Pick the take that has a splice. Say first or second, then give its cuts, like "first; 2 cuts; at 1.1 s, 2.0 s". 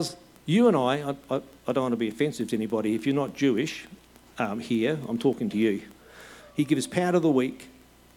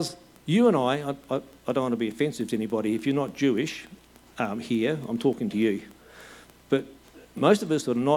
first; 1 cut; at 6.4 s